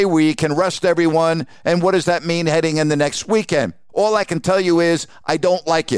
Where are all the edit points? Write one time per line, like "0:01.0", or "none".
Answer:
0:01.5
0:03.9